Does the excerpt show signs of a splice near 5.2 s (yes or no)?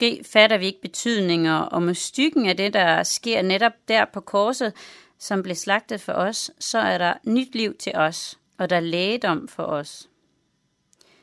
yes